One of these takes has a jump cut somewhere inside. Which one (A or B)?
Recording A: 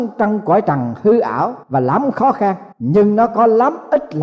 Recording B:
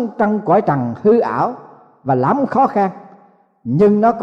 A